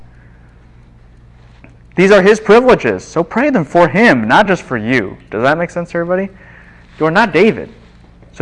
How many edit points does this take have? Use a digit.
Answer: 0